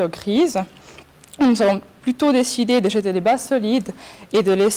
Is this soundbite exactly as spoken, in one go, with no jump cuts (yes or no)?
yes